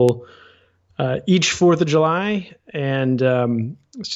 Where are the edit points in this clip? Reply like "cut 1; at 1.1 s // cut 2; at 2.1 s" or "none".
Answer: none